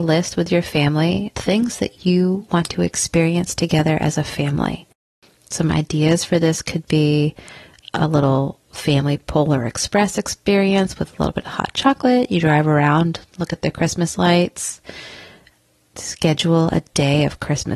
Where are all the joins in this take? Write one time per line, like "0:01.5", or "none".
0:01.3